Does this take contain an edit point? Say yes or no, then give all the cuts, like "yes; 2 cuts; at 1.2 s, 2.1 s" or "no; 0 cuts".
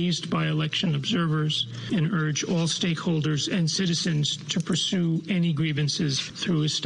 no; 0 cuts